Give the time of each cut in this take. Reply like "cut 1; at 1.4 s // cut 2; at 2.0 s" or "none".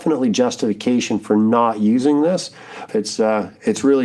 cut 1; at 2.9 s